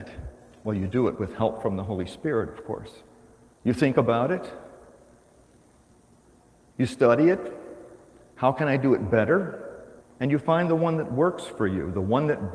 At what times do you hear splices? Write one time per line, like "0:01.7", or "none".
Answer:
0:03.5
0:10.0

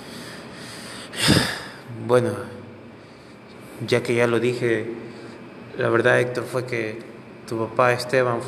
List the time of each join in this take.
none

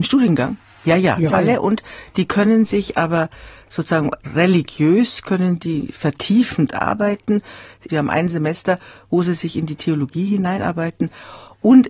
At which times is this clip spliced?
0:01.3
0:07.9

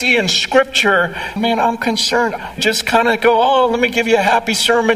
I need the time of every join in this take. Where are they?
0:01.4
0:02.6

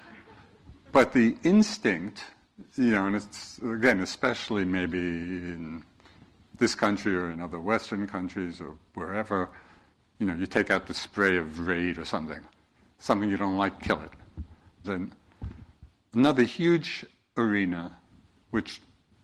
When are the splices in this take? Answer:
0:14.8

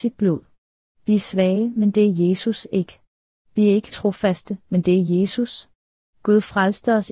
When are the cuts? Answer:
none

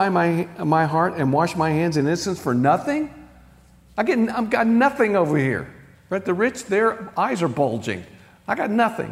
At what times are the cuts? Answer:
none

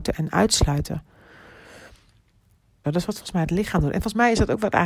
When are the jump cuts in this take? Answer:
0:02.8

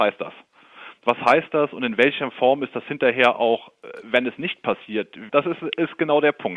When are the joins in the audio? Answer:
0:05.3

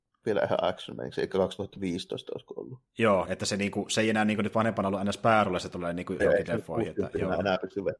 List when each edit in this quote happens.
0:03.2
0:06.2

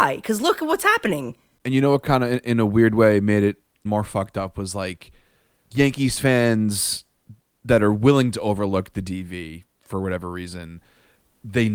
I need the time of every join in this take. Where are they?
0:03.9

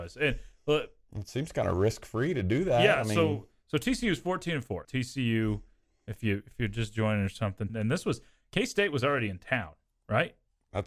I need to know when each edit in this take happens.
0:04.8
0:07.7

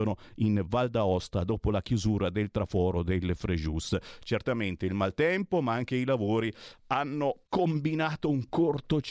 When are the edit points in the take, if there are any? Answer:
0:07.5

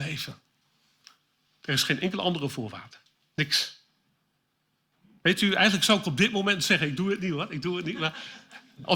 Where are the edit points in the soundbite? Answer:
none

